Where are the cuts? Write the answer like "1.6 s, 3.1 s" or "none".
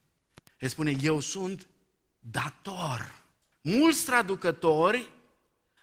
3.5 s